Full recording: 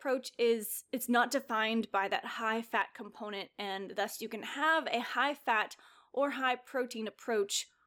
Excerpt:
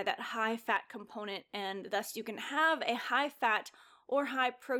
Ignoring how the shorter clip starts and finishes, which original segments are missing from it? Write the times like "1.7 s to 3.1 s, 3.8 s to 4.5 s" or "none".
none